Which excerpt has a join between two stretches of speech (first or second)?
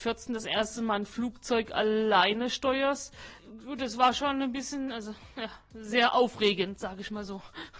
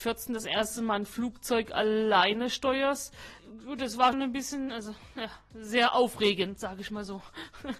second